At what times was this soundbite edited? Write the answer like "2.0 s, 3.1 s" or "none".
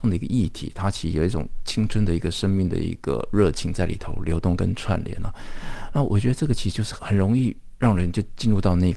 7.0 s